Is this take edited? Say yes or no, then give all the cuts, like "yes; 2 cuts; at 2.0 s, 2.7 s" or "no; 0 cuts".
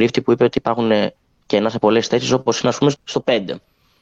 yes; 1 cut; at 2.9 s